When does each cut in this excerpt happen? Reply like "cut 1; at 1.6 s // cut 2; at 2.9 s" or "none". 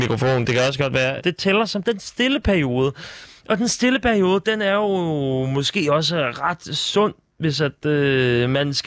cut 1; at 1.2 s